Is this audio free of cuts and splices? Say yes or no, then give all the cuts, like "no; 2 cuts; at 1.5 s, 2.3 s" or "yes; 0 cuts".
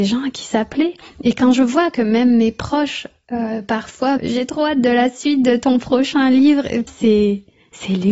no; 2 cuts; at 4.2 s, 6.9 s